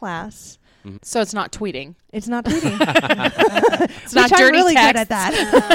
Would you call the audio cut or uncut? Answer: cut